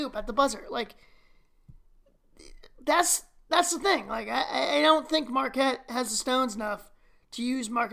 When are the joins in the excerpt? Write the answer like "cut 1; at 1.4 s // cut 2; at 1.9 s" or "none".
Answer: none